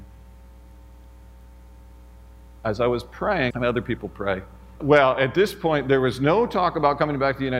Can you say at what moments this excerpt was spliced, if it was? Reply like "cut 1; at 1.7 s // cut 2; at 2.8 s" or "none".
cut 1; at 3.5 s // cut 2; at 4.8 s